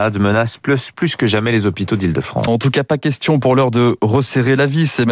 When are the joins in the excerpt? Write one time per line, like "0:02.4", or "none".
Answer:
0:02.5

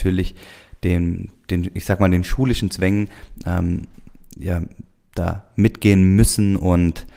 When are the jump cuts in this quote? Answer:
none

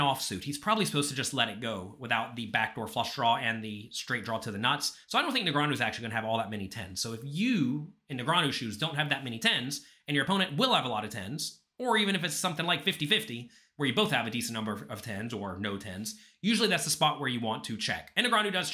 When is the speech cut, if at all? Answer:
none

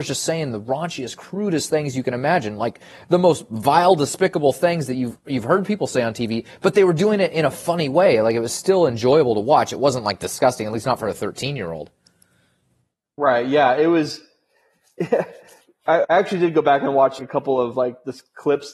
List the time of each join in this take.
0:16.0
0:17.2

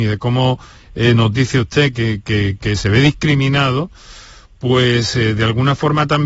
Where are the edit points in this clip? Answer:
none

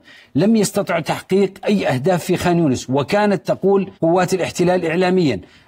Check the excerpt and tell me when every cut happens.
0:04.0

